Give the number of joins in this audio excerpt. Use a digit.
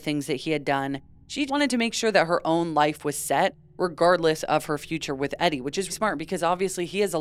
2